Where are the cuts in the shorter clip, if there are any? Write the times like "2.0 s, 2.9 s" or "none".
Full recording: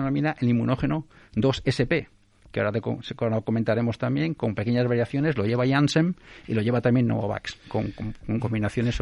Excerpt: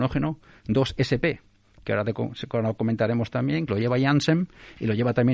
3.7 s